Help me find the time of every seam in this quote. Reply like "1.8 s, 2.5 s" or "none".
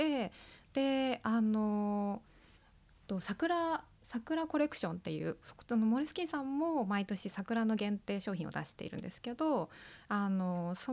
none